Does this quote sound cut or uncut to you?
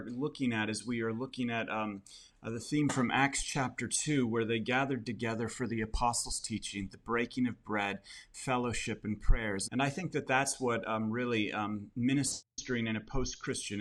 cut